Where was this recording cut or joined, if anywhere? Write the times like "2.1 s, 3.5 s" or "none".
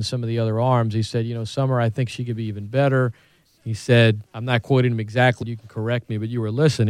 4.3 s, 5.4 s